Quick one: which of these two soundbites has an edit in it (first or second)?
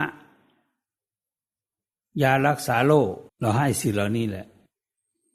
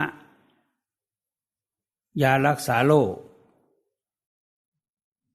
first